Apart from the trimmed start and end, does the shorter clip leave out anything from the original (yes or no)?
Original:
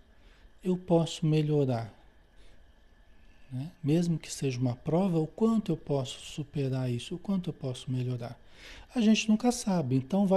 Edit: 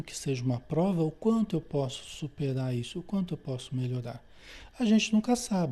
no